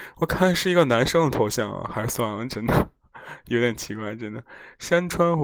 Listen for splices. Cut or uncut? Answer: uncut